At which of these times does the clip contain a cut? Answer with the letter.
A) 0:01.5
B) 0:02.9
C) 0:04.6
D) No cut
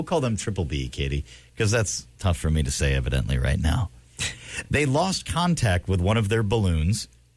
D